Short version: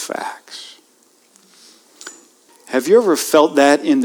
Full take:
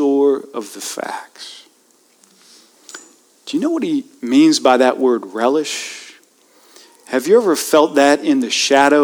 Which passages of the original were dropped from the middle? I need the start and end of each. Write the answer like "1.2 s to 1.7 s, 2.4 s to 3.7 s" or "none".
3.4 s to 6.9 s